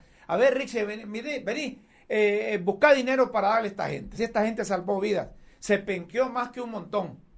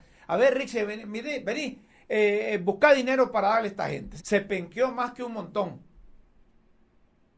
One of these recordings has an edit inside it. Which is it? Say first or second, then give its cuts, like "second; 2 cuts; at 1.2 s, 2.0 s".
second; 1 cut; at 4.2 s